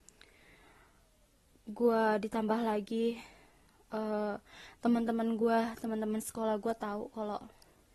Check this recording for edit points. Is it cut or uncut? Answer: uncut